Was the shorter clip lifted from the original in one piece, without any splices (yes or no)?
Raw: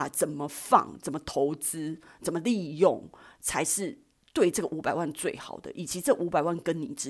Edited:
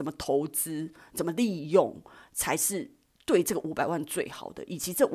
yes